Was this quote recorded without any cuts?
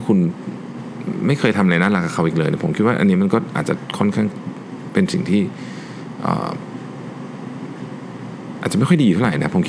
yes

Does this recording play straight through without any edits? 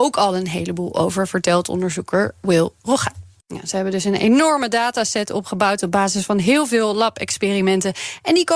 no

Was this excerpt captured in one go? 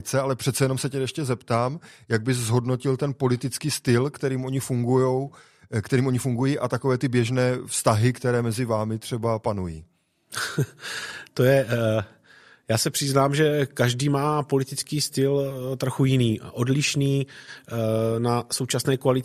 yes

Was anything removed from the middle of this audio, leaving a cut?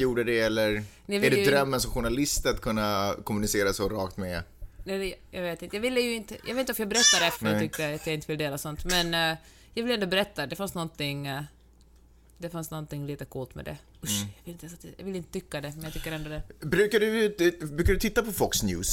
yes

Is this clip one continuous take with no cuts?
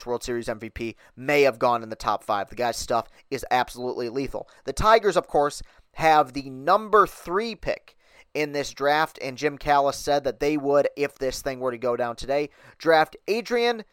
yes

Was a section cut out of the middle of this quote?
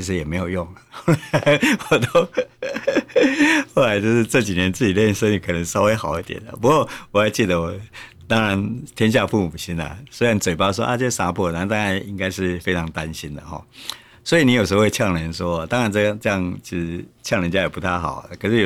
no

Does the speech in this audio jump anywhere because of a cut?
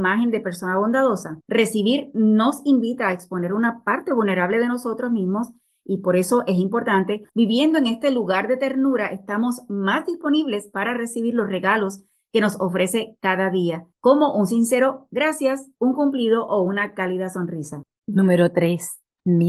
no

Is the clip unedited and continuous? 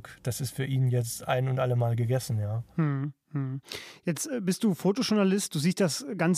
yes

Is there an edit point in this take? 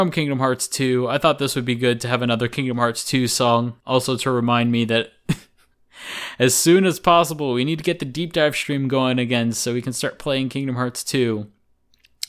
yes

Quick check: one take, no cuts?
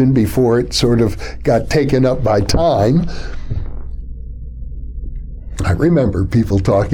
yes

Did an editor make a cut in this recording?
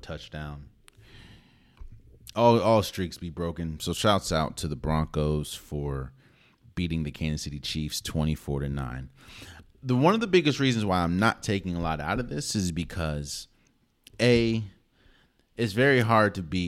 no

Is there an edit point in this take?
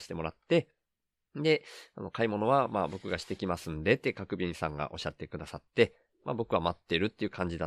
no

